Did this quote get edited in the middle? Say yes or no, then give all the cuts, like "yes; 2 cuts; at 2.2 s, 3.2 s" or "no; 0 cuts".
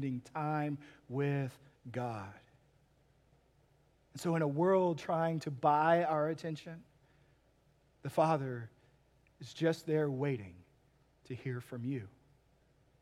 no; 0 cuts